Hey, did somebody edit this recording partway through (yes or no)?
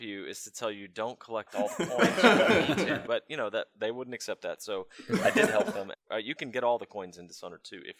yes